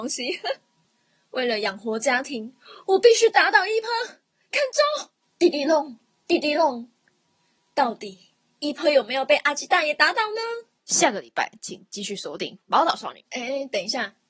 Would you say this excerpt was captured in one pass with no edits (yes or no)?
no